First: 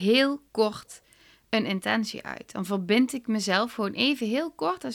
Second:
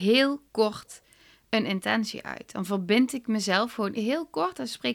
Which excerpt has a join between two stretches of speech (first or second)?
second